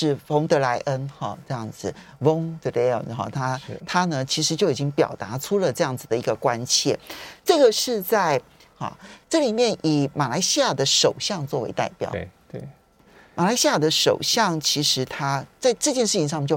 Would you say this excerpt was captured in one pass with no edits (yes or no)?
no